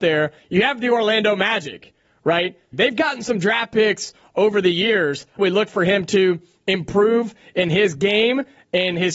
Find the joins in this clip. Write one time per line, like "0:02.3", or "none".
0:02.7
0:05.4